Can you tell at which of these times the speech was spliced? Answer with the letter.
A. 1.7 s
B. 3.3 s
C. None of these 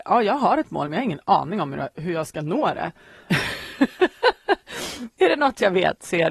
B